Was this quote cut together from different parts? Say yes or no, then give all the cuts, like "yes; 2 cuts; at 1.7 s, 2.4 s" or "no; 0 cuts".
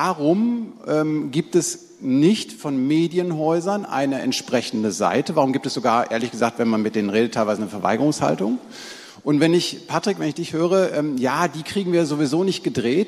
no; 0 cuts